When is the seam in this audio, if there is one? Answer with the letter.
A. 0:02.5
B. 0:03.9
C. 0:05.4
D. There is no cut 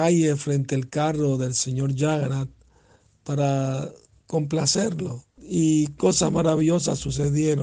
C